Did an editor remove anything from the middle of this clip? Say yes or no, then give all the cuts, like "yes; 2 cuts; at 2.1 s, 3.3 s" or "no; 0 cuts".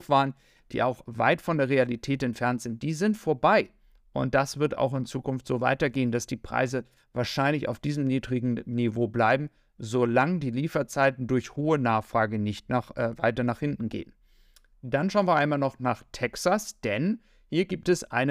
yes; 1 cut; at 1.0 s